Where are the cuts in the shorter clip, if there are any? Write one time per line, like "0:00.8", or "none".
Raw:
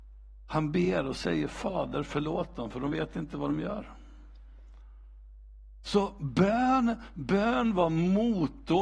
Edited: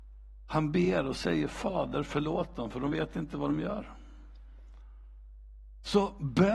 none